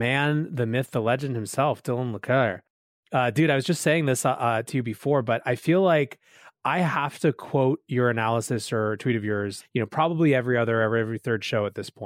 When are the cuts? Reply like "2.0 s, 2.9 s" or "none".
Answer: 9.6 s